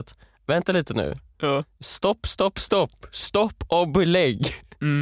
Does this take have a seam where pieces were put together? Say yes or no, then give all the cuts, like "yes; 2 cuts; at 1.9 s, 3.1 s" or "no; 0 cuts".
no; 0 cuts